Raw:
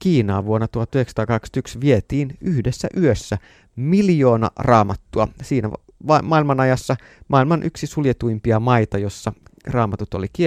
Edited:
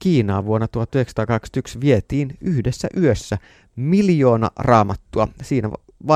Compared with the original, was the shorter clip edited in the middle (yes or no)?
no